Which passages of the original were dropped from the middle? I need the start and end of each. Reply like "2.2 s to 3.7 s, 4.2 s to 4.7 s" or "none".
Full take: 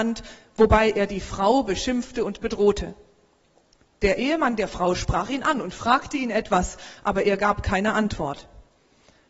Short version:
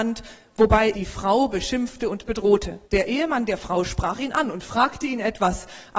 0.9 s to 1.1 s, 3.0 s to 3.9 s